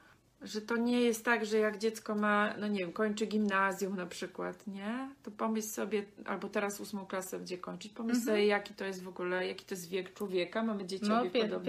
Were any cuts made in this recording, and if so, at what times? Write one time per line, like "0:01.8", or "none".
none